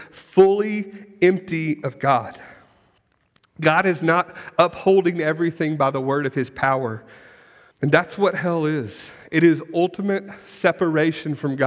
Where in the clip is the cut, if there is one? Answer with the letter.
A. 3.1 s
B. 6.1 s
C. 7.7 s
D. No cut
C